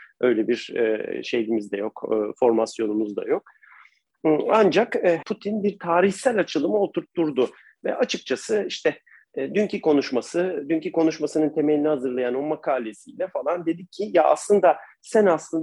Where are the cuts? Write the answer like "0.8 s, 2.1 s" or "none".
5.2 s